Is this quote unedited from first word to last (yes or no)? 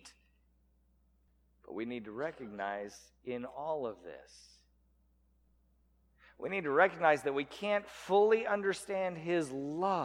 yes